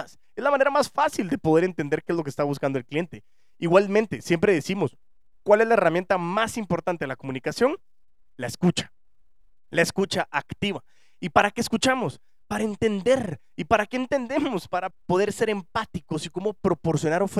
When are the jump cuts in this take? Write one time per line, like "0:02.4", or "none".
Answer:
0:14.9